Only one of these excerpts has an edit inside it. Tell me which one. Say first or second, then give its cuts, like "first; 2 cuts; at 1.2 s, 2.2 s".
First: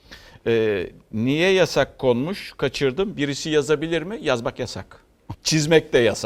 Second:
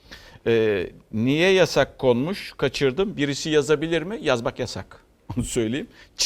first; 1 cut; at 5.3 s